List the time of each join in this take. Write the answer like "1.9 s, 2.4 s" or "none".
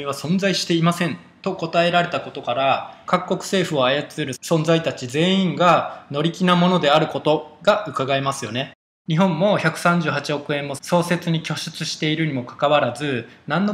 3.1 s, 9.0 s

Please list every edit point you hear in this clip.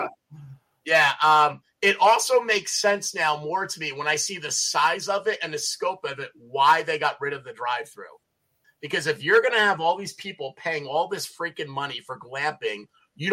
8.6 s

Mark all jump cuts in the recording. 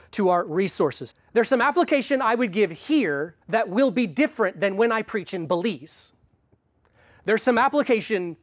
1.1 s, 3.4 s

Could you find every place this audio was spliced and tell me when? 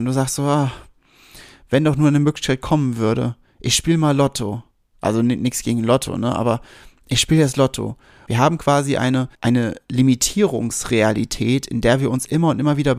8.3 s, 9.3 s

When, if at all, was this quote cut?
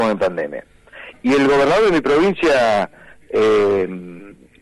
1.1 s

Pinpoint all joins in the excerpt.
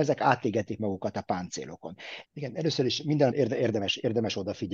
2.2 s, 3.3 s

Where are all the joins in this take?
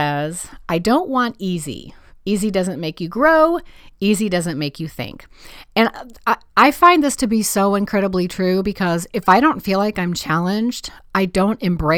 none

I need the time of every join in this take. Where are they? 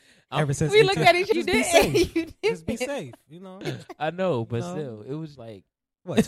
1.3 s, 5.4 s

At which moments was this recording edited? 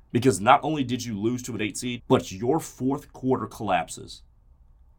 2.0 s

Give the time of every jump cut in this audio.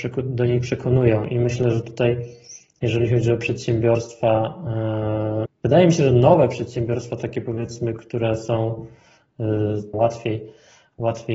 5.5 s, 9.9 s

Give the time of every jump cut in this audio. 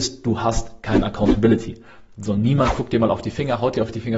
none

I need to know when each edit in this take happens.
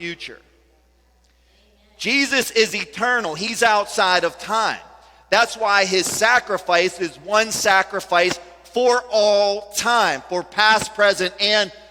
none

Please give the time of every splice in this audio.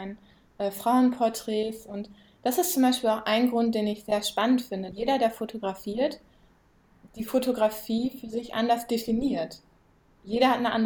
4.9 s

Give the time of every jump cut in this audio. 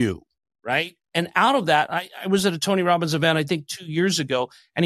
1.0 s

